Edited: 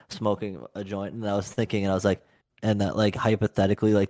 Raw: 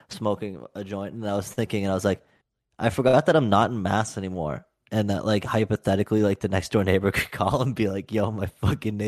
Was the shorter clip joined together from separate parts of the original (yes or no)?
yes